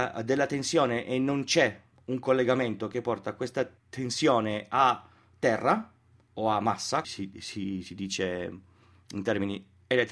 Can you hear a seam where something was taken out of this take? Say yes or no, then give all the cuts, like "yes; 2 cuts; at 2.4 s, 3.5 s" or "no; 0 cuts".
yes; 2 cuts; at 3.8 s, 7.0 s